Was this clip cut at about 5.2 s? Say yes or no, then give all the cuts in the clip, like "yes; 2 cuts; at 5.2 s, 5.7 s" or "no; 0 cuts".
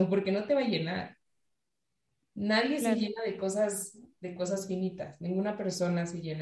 no; 0 cuts